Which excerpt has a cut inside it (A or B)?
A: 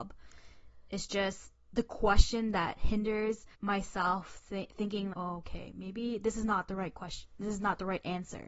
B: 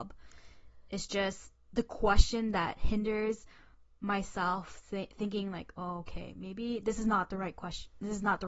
A